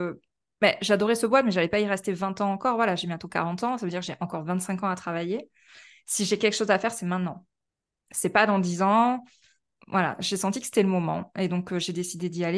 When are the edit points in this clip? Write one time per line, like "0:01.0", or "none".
none